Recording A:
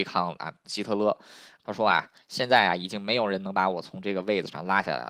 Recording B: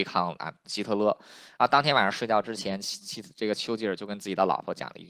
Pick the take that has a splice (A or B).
A